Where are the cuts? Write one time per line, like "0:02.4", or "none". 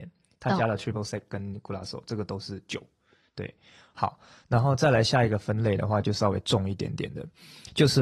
none